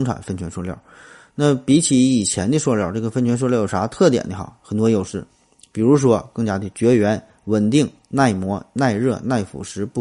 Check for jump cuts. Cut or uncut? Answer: uncut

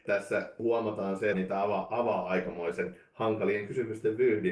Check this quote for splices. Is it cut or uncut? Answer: cut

